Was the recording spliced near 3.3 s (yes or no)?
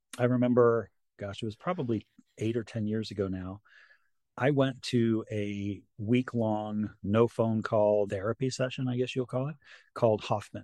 no